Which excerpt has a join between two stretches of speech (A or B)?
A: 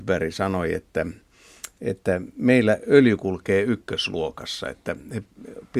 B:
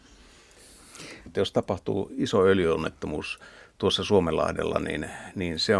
B